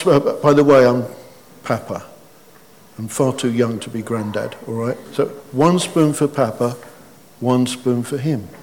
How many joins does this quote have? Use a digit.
1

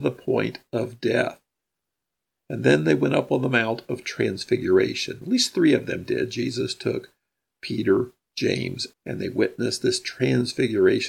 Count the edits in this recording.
1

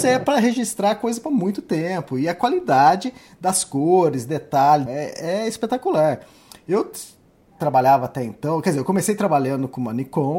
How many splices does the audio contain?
1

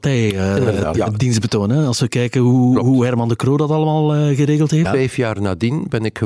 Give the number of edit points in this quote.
2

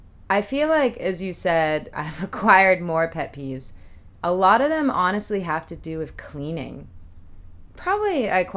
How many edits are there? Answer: 1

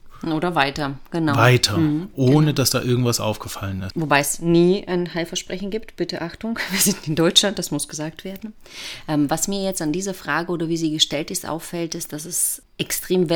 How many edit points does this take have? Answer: 1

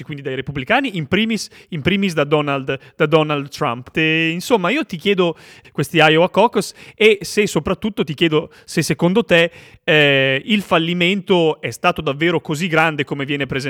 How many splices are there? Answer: 2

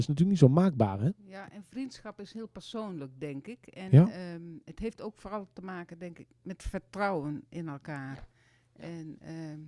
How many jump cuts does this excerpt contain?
0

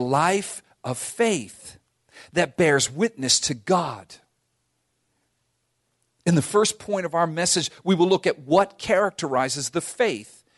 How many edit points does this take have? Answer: 0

